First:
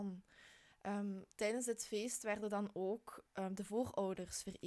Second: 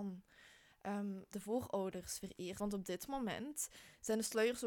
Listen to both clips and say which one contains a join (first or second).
second